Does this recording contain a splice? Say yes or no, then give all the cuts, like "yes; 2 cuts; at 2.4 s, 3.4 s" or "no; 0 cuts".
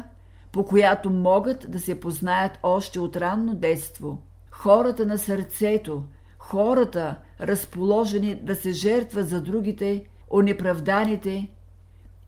yes; 3 cuts; at 4.5 s, 6.2 s, 10.2 s